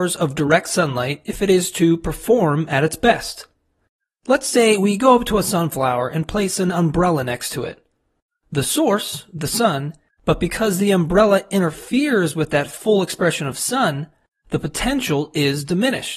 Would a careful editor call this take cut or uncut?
cut